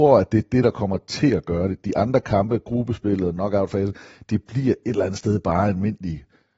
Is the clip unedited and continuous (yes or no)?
yes